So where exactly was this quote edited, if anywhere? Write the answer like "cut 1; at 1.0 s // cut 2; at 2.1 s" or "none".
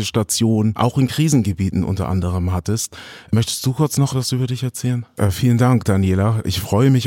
cut 1; at 5.2 s